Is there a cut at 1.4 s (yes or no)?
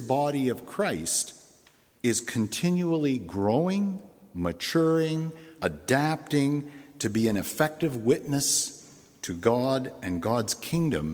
no